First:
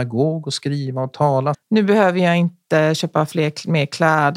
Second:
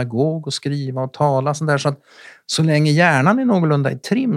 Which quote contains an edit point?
first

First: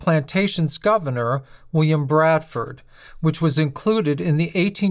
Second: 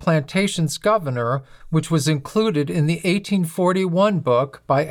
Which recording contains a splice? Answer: second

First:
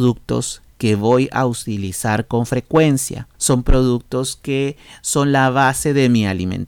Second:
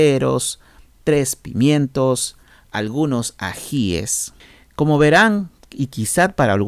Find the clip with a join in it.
first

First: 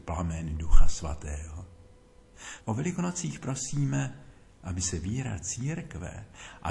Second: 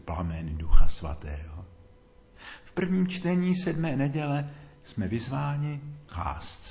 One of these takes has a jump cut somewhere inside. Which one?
first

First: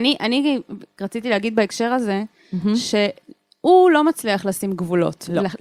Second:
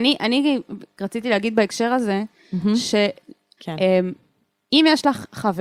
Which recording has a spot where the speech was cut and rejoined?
second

